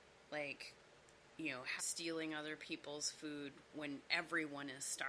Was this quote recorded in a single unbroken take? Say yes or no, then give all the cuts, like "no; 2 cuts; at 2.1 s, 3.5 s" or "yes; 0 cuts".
no; 1 cut; at 1.8 s